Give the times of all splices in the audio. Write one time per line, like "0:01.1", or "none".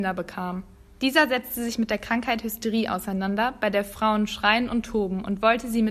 0:01.0